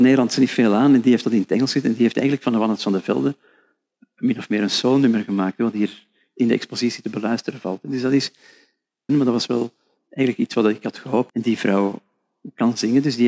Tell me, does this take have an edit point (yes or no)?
yes